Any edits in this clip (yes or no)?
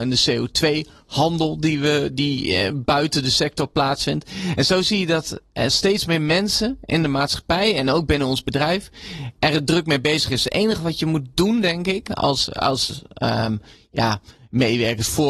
no